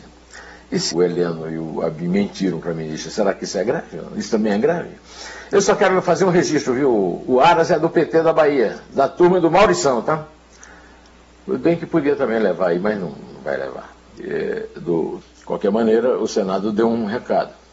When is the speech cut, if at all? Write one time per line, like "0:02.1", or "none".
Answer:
0:00.9
0:14.2
0:15.2